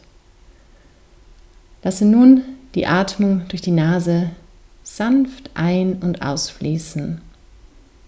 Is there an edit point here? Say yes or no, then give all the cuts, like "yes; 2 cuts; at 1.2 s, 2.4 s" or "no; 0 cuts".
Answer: no; 0 cuts